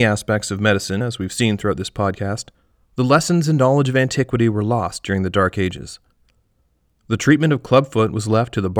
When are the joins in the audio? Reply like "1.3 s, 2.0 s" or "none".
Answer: none